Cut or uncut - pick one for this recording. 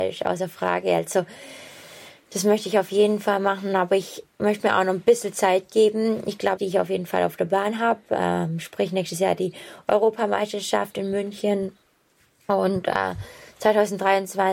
cut